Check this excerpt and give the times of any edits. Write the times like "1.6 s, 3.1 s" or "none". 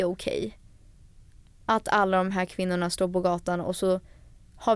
none